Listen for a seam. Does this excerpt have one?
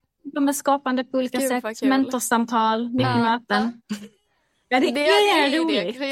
no; 0 cuts

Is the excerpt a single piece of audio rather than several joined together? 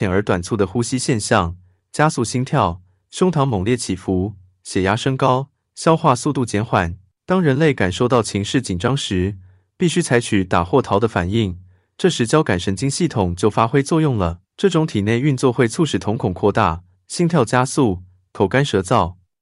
no; 3 cuts; at 7.2 s, 14.5 s, 16.9 s

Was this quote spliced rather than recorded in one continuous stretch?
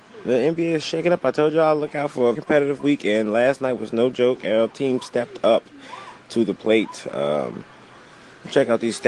yes; 1 cut; at 2.4 s

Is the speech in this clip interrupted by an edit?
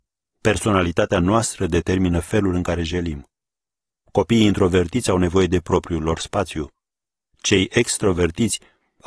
no; 0 cuts

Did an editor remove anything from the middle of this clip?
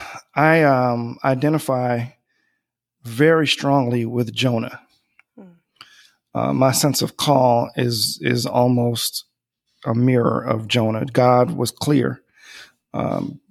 no; 0 cuts

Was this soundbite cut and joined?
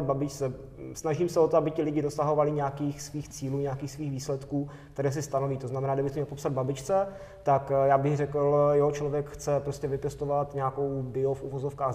no; 0 cuts

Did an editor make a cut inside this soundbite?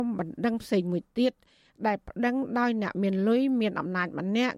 no; 0 cuts

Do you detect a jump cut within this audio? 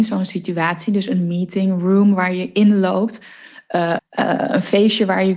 yes; 1 cut; at 4.0 s

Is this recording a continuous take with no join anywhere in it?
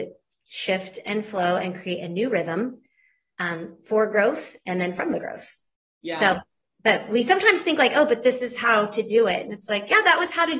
yes; 0 cuts

